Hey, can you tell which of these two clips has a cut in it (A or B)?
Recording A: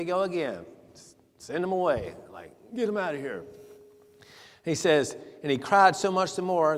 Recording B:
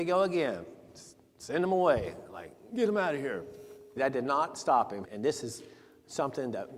B